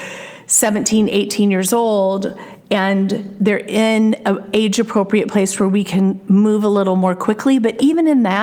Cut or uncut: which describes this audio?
uncut